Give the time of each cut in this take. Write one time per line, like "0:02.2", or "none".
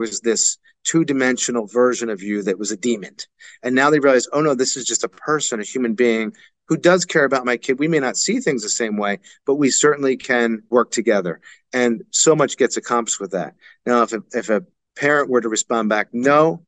0:10.7